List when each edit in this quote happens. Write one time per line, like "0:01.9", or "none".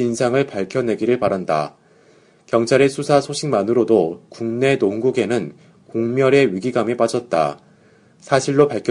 none

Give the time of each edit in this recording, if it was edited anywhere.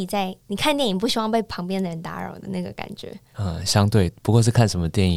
none

